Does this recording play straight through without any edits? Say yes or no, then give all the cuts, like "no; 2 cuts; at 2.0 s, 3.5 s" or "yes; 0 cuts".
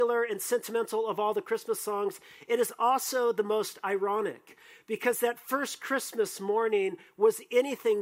yes; 0 cuts